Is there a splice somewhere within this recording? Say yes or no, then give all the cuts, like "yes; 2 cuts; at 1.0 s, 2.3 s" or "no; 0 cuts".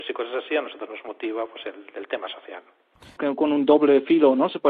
yes; 1 cut; at 3.2 s